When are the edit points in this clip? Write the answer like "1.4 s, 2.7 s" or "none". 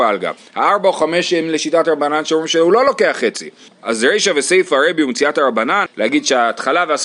3.7 s, 5.9 s

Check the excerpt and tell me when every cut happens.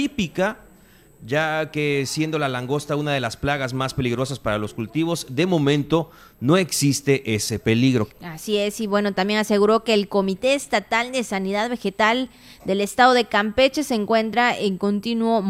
8.1 s

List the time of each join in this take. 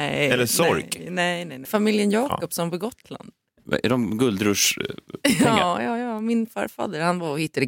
1.7 s

